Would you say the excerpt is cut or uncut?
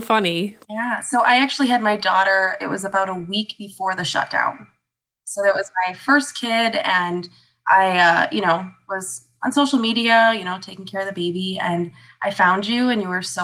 uncut